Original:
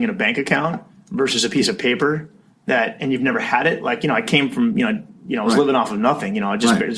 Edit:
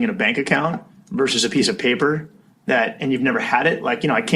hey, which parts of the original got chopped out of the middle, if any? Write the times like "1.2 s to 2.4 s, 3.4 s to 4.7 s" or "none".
none

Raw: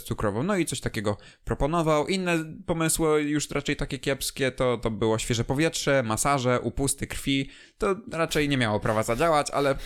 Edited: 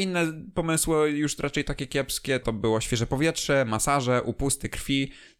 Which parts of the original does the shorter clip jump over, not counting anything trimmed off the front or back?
4.5 s to 4.8 s

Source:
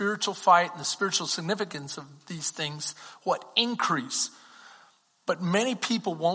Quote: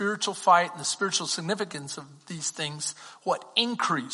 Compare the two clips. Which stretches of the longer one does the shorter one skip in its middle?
none

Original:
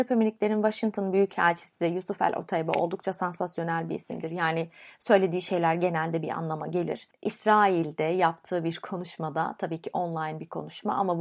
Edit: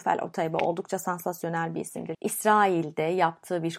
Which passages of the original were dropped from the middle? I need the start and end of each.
4.3 s to 7.2 s

